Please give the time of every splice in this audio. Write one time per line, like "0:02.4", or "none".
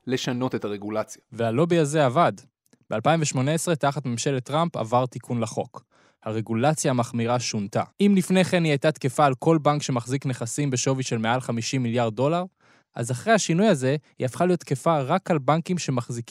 0:07.9